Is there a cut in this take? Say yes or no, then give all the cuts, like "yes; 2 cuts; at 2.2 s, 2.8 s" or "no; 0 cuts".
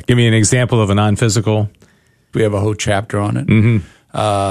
yes; 1 cut; at 2.3 s